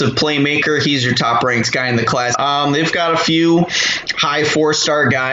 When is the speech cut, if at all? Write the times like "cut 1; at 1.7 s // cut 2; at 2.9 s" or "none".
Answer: cut 1; at 2.3 s

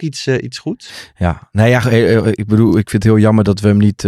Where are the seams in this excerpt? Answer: none

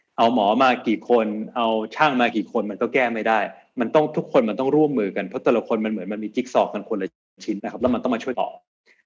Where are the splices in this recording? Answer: cut 1; at 7.6 s

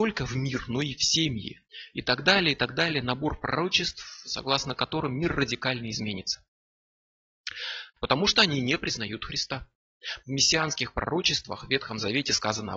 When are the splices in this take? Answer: cut 1; at 7.9 s // cut 2; at 10.2 s

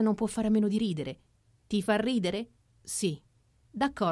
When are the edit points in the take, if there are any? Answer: cut 1; at 2.7 s

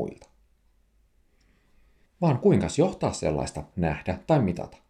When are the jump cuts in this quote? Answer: cut 1; at 3.7 s

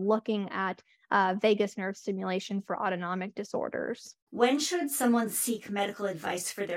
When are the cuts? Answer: cut 1; at 4.2 s

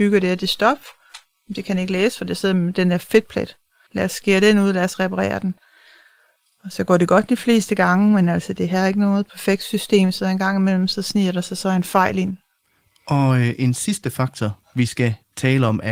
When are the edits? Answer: cut 1; at 3.9 s

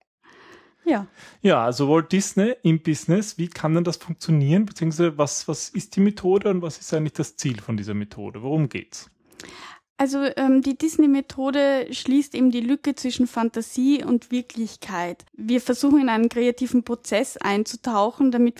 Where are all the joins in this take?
cut 1; at 15.3 s

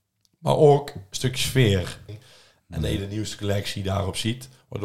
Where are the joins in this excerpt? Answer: cut 1; at 2.1 s

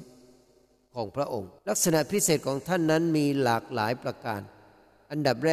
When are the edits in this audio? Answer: cut 1; at 1.6 s

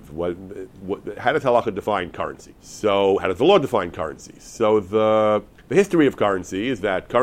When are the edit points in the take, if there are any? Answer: cut 1; at 2.6 s

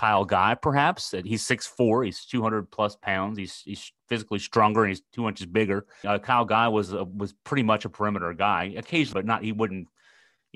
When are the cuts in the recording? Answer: cut 1; at 6.0 s // cut 2; at 9.1 s

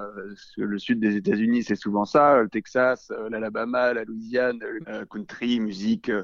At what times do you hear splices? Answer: cut 1; at 4.8 s

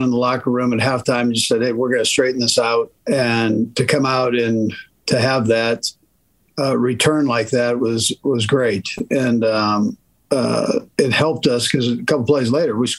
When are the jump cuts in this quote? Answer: cut 1; at 3.0 s

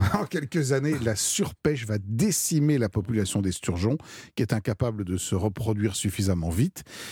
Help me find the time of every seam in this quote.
none

